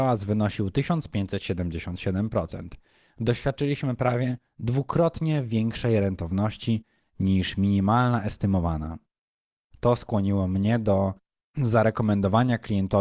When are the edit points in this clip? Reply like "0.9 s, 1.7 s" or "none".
none